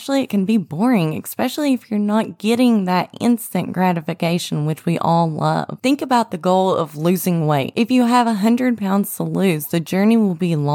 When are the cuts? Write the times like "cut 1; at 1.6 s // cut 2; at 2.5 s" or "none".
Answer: none